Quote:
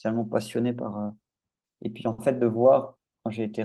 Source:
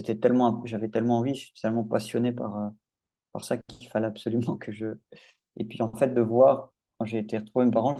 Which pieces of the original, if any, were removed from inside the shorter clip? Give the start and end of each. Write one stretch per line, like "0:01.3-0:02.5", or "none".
0:03.2-0:05.4